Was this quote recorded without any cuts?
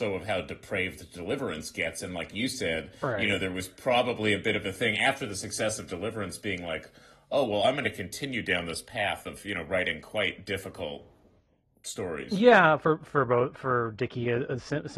yes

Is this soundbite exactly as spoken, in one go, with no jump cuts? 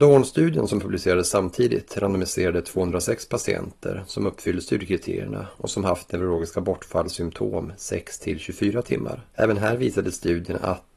no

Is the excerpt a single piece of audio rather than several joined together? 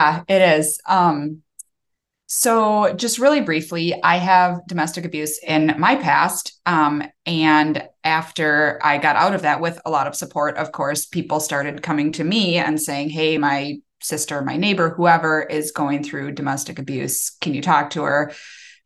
yes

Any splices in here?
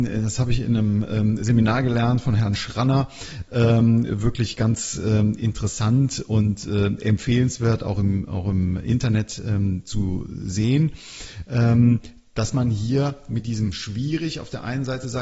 no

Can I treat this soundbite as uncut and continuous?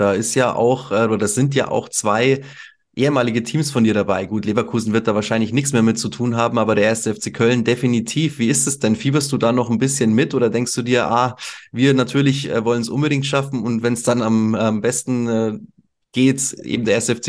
yes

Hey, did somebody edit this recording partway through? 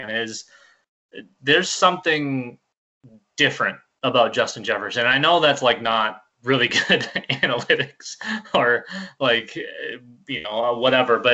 yes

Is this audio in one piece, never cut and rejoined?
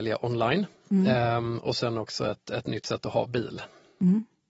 yes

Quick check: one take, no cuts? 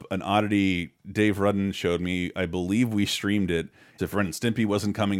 no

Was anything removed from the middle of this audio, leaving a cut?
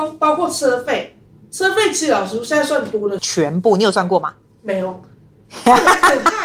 yes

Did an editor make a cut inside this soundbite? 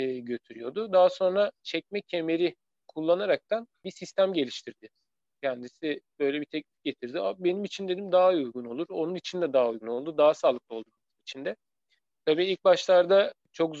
no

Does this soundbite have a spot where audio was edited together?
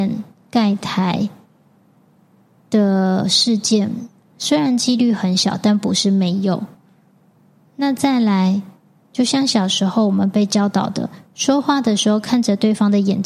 no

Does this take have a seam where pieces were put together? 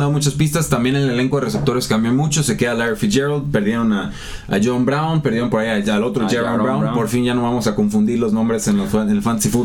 no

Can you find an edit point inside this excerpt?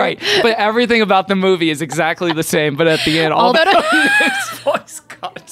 yes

